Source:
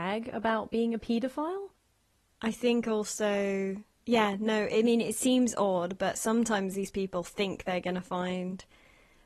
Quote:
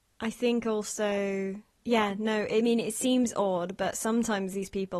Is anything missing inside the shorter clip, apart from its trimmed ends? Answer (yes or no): no